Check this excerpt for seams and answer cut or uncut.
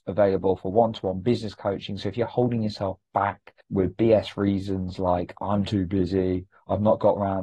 cut